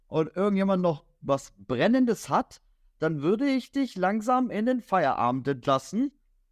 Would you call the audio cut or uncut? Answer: uncut